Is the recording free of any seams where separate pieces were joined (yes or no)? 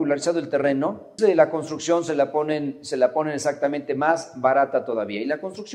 no